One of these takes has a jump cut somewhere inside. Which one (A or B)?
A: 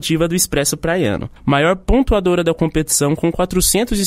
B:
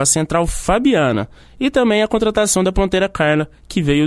A